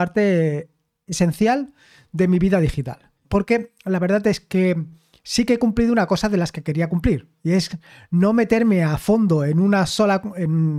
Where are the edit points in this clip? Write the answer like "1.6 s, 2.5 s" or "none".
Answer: 3.2 s